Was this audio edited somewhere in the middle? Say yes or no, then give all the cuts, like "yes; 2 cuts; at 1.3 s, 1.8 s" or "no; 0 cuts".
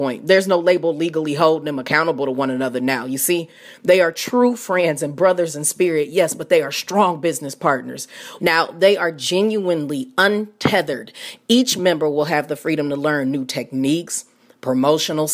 yes; 1 cut; at 8.4 s